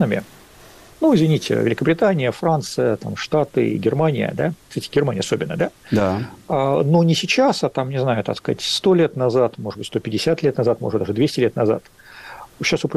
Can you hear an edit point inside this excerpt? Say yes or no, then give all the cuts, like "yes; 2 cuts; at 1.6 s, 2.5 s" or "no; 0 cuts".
no; 0 cuts